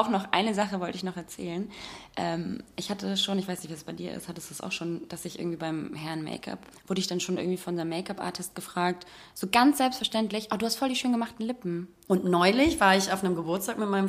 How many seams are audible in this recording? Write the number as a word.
two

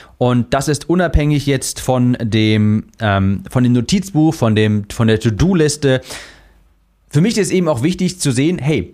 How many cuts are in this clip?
zero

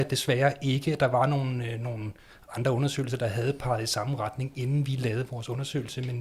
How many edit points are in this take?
zero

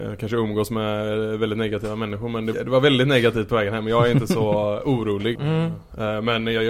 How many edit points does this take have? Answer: two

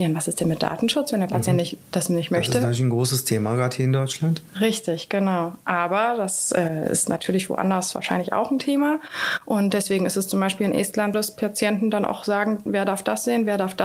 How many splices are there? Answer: two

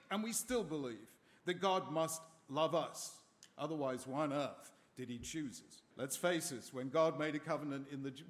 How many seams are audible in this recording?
one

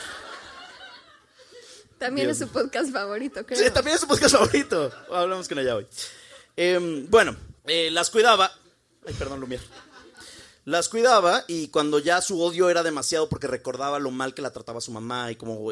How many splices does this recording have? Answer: one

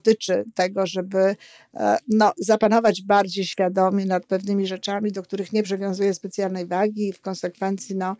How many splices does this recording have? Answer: zero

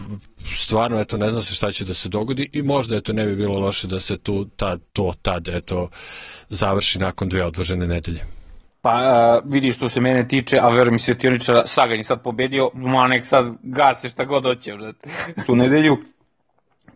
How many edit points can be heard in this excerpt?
one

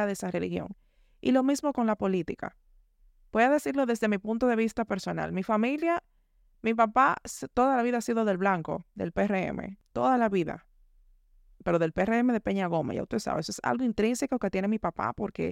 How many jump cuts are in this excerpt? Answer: zero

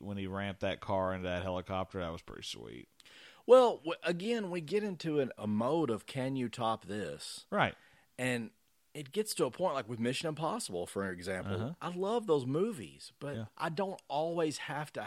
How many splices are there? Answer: one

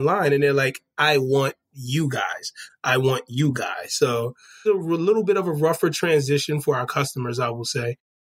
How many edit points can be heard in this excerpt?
two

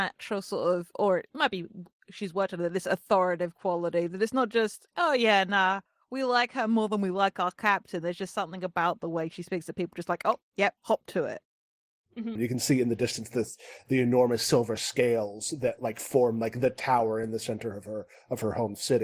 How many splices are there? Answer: one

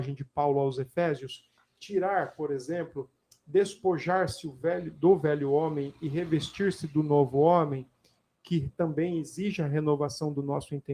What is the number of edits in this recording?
zero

